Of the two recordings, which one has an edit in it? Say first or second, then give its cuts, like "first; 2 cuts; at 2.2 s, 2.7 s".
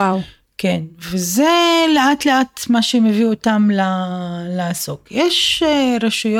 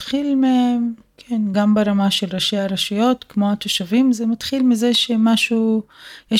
second; 1 cut; at 1.5 s